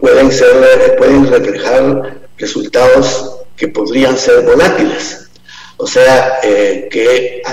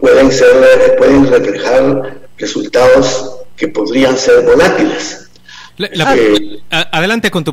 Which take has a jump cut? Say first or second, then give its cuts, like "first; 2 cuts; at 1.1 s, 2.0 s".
second; 1 cut; at 5.7 s